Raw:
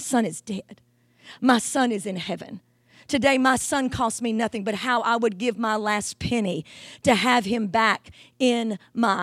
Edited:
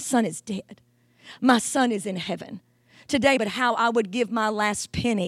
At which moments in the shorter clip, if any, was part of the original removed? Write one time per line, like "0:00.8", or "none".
0:03.4